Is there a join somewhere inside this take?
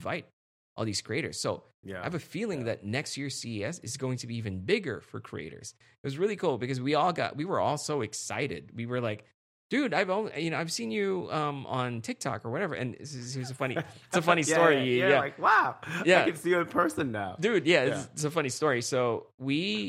no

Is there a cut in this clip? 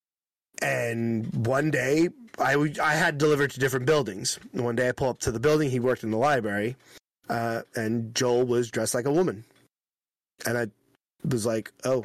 no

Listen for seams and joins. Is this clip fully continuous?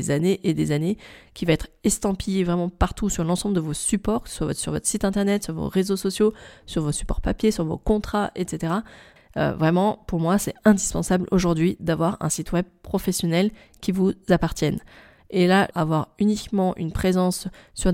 no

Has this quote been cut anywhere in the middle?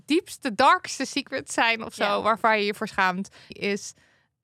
yes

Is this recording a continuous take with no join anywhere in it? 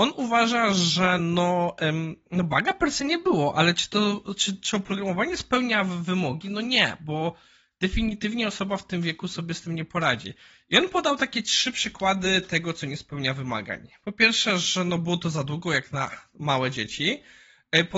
yes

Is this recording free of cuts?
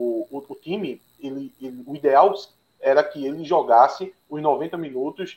yes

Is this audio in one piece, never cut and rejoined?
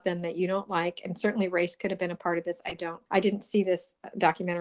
no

